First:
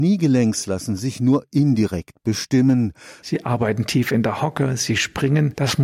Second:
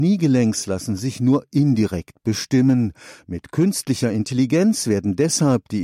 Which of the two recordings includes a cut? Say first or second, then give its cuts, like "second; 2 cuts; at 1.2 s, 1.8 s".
first; 1 cut; at 3.2 s